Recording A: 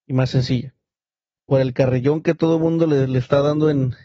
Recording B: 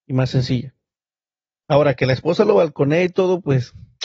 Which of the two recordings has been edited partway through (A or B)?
A